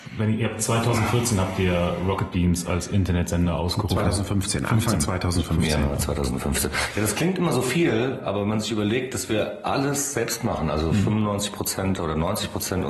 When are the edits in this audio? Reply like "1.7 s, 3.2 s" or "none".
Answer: none